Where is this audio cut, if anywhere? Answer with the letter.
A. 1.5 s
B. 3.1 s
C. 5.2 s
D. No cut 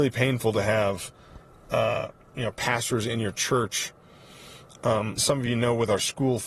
C